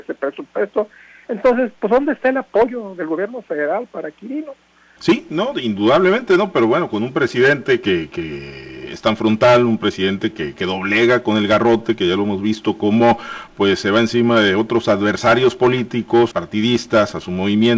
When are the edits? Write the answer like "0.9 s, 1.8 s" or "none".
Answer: 5.0 s, 16.3 s